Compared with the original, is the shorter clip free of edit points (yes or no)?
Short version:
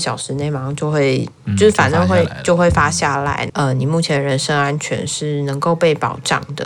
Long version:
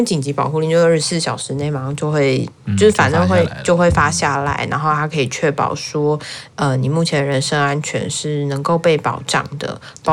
no